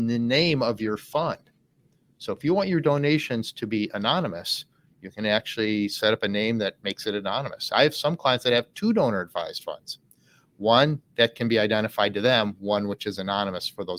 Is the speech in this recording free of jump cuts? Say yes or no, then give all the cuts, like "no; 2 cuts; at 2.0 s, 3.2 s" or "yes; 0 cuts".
yes; 0 cuts